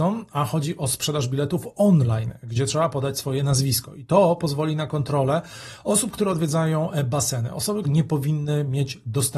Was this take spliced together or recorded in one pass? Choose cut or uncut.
cut